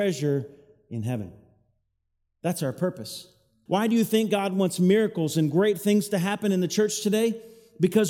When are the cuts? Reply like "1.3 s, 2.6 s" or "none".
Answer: 3.7 s